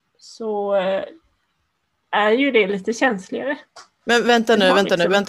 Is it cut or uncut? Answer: uncut